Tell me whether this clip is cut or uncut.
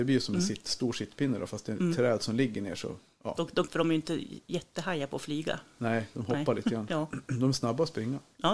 cut